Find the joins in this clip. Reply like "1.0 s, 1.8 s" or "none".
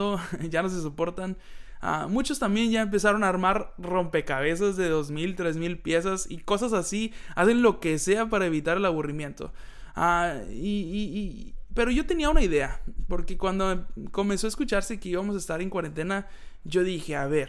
none